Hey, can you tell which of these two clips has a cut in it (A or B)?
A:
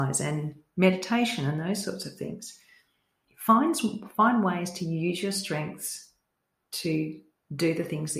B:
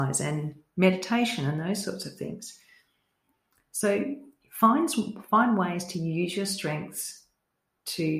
A